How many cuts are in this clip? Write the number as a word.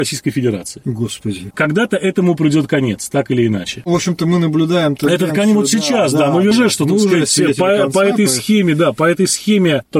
two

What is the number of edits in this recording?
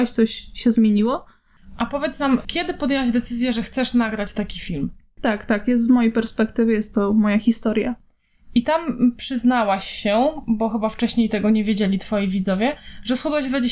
two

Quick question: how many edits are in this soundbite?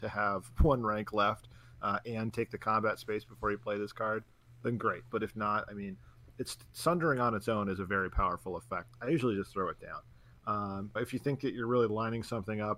three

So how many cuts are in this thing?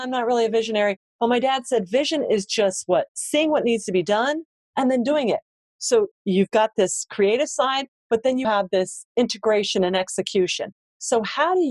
two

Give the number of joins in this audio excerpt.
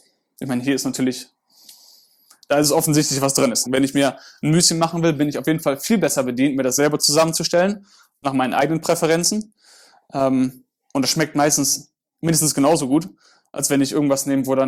one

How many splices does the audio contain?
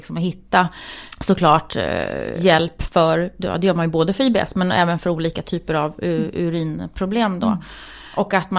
zero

